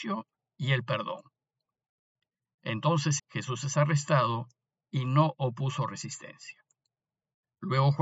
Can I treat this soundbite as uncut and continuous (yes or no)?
no